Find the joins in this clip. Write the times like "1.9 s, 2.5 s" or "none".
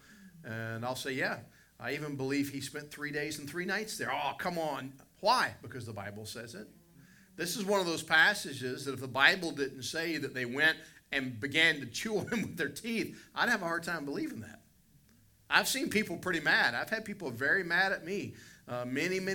none